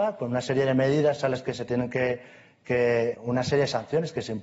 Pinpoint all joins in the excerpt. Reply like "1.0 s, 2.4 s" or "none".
3.1 s